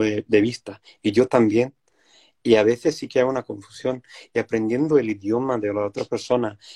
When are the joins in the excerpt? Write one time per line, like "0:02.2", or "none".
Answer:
none